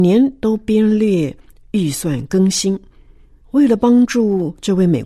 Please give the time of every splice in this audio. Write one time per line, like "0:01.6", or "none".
0:03.4